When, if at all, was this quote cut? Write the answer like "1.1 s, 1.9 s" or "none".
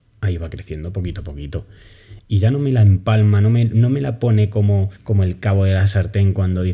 2.2 s, 5.0 s